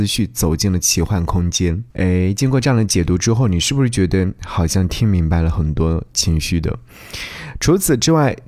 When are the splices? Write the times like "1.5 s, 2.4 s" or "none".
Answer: 1.9 s, 4.4 s